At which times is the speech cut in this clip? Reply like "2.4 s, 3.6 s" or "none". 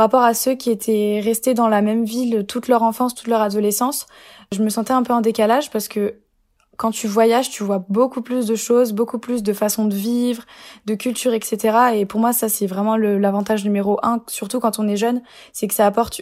none